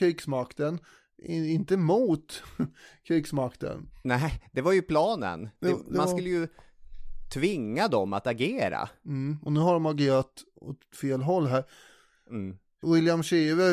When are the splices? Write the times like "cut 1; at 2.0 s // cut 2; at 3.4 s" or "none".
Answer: none